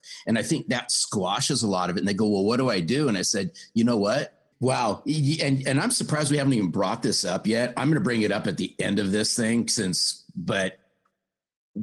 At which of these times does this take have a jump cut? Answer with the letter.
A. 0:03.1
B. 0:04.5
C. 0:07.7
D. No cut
B